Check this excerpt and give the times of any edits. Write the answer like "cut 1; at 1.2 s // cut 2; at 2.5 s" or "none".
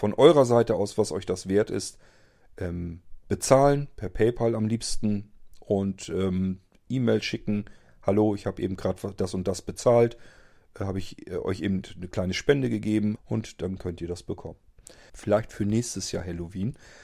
cut 1; at 13.2 s // cut 2; at 15.1 s